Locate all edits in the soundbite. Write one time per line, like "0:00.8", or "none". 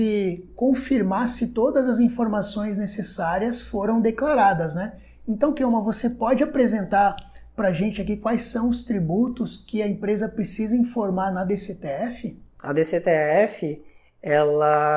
none